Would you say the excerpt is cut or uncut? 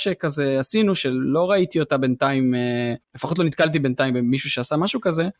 cut